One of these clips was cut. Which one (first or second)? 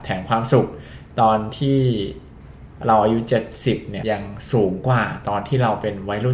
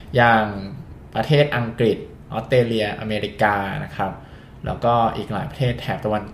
first